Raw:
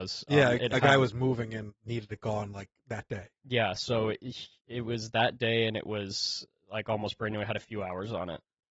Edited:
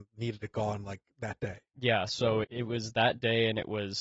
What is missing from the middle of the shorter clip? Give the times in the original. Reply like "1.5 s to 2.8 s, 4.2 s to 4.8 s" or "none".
4.1 s to 4.6 s

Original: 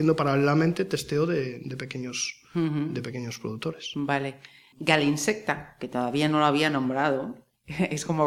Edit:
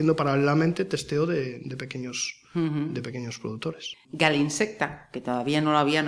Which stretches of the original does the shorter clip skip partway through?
3.9 s to 4.6 s

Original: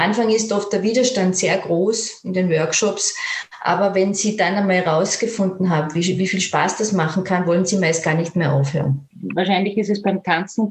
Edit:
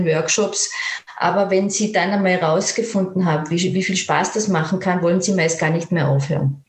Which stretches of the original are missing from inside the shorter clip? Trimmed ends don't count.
none

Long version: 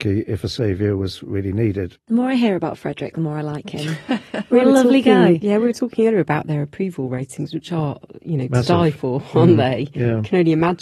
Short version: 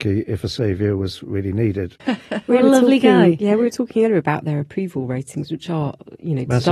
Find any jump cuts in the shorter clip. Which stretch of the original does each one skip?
2.0 s to 4.0 s

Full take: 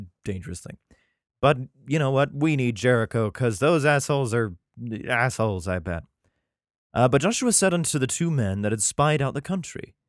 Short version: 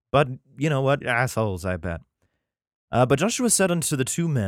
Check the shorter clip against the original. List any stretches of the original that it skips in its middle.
2.3 s to 5.0 s

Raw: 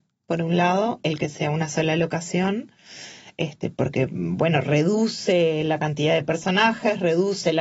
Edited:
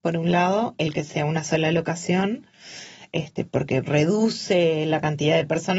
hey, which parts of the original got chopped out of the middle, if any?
4.1 s to 4.6 s

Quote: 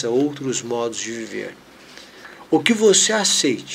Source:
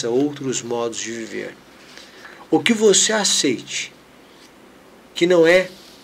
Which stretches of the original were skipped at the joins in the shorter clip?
none

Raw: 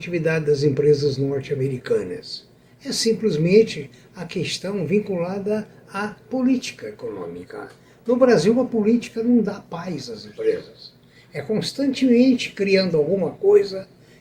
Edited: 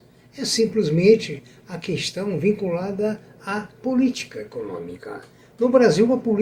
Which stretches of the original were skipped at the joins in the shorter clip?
none

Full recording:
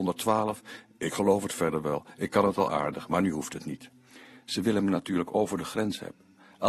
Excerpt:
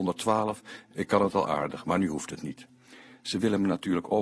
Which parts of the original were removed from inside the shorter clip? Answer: 0.9 s to 2.1 s

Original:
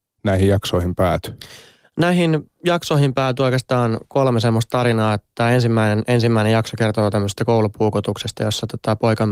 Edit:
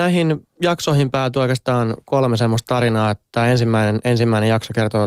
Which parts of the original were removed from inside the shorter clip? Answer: none

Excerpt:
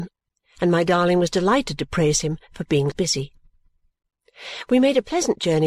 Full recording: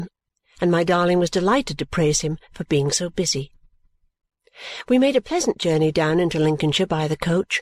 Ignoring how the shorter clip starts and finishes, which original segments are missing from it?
2.9 s to 3.1 s

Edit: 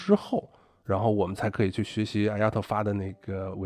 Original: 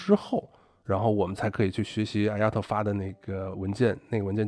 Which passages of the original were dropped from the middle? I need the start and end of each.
none

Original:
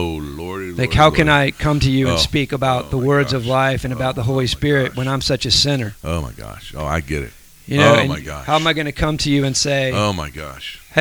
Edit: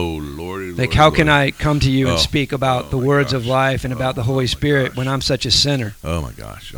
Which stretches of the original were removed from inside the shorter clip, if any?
none

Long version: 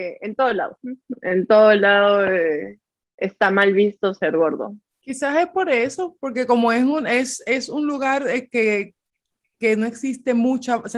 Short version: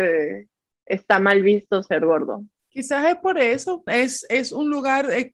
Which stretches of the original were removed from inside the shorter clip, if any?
6.2 s to 7.0 s

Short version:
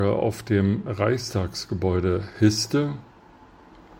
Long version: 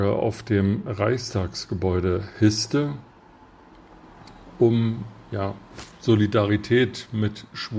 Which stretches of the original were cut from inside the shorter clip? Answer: none

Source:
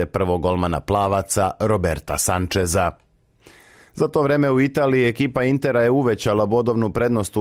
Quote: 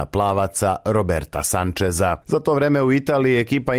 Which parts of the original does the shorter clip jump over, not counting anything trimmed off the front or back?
3.0 s to 3.9 s

